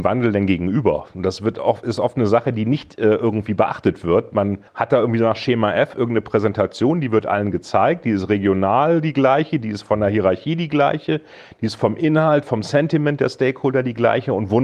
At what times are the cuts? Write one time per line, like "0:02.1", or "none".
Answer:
0:04.7